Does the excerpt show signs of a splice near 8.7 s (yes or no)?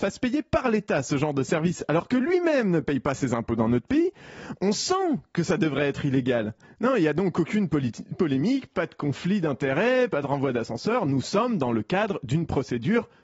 no